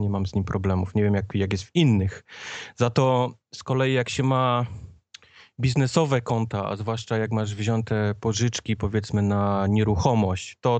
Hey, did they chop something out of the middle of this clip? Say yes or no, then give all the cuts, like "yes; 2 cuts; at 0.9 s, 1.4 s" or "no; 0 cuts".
no; 0 cuts